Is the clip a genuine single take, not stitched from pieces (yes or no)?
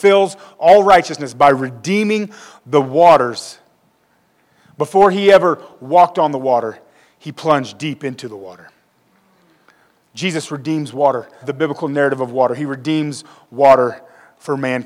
no